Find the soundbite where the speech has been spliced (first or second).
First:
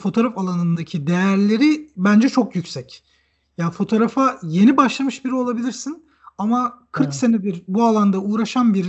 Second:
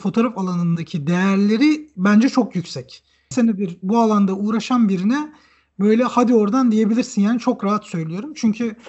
second